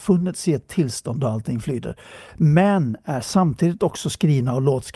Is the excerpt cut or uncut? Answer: uncut